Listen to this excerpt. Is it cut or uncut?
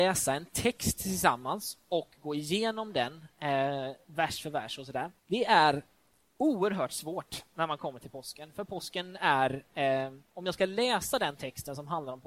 cut